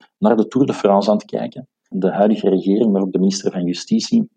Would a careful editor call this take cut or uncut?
cut